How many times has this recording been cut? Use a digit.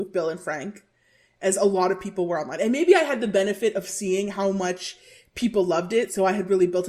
0